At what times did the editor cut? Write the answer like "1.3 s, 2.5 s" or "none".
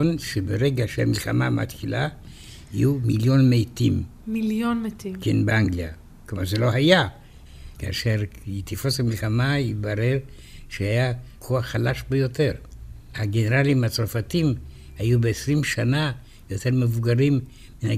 7.8 s